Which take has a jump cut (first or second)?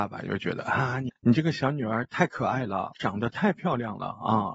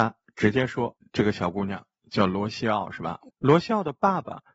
second